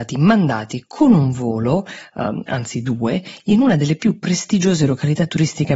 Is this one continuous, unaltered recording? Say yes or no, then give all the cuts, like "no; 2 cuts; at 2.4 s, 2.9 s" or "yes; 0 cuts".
yes; 0 cuts